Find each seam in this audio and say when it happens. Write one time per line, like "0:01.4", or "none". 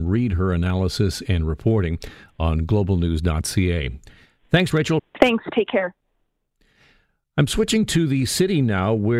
0:05.0